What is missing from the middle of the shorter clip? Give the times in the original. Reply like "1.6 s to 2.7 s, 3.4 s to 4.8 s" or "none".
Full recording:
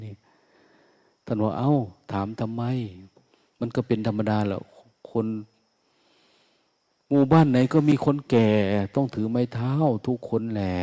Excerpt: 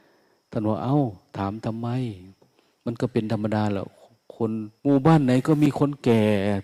5.5 s to 7.0 s